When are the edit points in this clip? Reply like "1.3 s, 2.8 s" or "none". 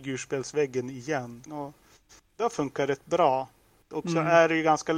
1.5 s